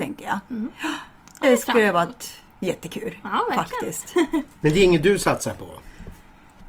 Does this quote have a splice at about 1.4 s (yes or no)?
yes